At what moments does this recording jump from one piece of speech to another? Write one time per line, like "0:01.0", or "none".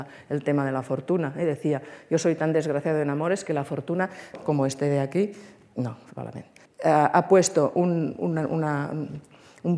0:04.3
0:06.7